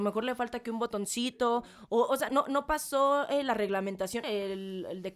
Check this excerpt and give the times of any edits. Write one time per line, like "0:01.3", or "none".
0:02.3
0:04.2